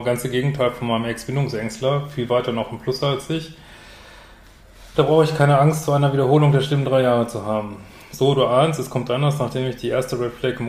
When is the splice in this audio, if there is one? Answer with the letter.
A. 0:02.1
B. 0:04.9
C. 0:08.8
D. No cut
D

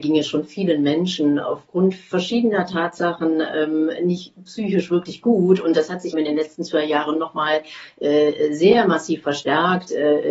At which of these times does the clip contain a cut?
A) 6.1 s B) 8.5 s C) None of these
A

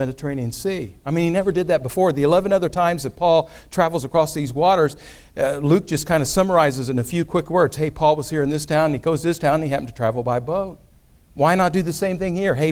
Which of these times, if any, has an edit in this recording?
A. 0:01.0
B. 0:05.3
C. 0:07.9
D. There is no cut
D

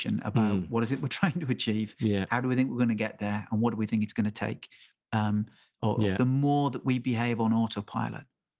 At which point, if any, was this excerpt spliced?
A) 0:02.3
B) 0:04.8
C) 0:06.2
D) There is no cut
C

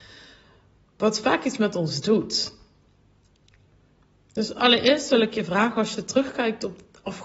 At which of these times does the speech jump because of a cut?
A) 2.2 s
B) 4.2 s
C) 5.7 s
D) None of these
D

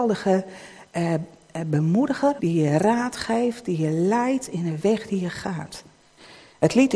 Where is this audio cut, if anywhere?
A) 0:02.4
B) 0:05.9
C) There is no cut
A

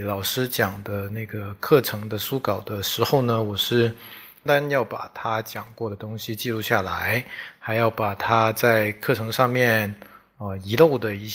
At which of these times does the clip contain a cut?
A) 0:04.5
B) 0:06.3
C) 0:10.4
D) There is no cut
A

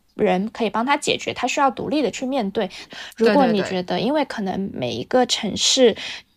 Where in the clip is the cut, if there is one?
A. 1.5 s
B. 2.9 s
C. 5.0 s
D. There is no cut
B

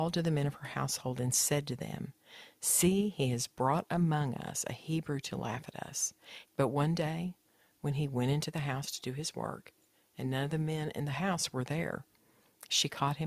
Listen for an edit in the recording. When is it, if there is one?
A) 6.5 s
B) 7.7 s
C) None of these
A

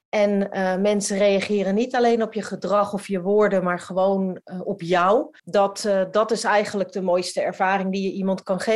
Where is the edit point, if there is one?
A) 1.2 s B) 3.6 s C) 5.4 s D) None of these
C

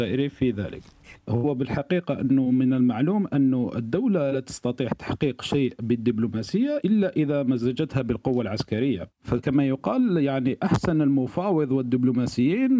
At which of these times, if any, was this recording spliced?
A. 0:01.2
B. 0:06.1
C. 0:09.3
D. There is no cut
A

